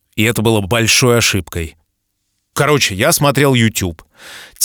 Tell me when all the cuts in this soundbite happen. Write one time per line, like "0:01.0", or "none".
0:02.5

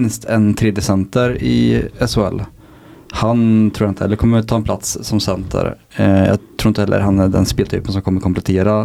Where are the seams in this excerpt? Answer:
none

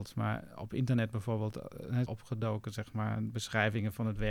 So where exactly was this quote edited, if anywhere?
0:02.1

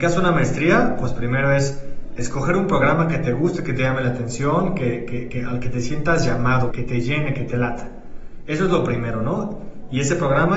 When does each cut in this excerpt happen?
0:06.7

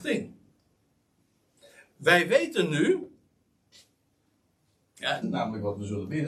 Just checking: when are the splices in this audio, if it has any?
0:05.2

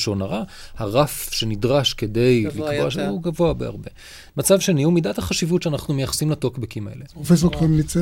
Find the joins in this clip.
0:04.3
0:07.1

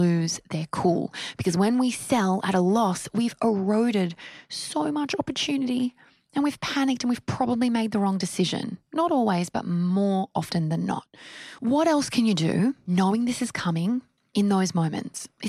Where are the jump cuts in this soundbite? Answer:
none

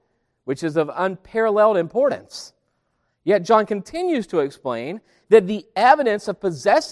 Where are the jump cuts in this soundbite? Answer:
none

